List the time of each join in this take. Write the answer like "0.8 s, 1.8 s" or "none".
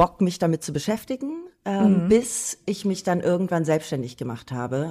none